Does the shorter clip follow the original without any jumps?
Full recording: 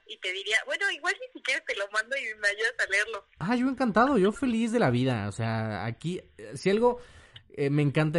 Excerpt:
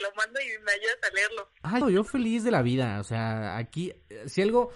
no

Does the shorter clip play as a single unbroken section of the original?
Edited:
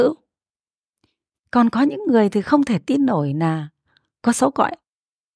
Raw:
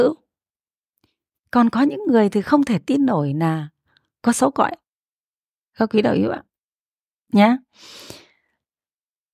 yes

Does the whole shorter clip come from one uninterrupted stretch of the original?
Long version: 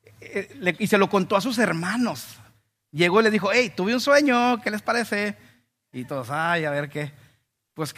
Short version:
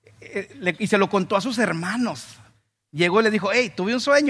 yes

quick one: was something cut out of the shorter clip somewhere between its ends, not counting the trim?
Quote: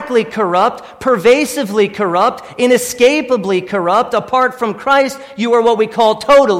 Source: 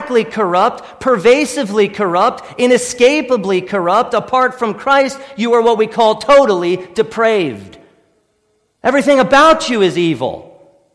no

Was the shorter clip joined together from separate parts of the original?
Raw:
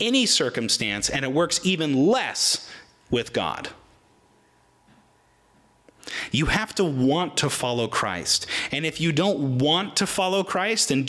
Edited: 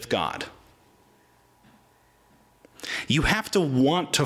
no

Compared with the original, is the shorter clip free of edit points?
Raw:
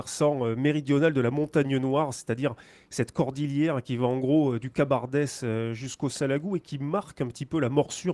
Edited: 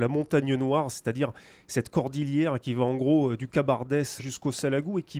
no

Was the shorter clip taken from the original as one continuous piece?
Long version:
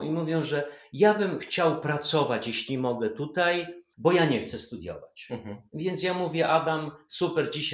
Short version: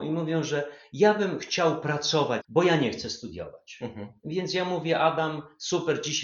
no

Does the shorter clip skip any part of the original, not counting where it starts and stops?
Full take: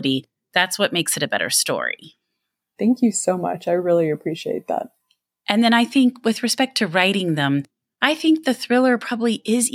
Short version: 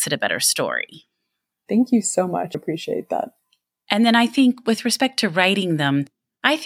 yes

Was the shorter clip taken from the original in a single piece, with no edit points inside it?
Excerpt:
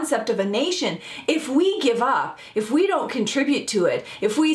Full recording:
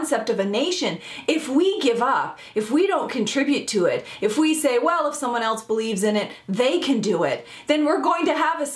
yes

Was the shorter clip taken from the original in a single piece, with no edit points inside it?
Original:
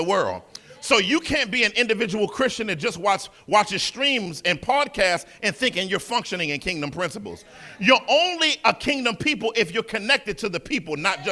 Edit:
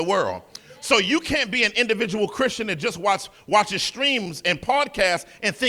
yes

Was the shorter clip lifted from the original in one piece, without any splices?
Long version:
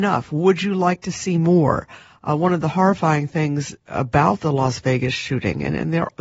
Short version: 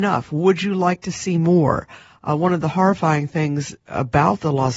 yes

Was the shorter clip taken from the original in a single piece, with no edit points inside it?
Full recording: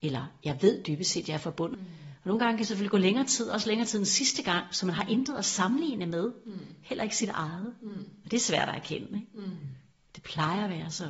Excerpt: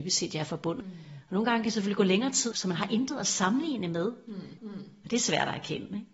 no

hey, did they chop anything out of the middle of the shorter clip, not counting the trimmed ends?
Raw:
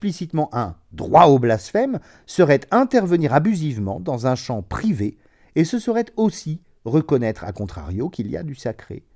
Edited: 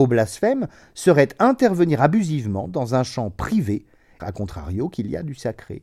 yes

